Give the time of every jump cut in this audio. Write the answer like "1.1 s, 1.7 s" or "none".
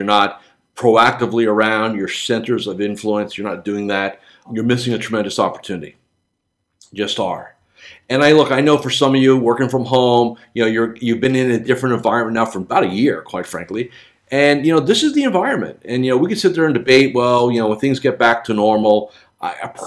none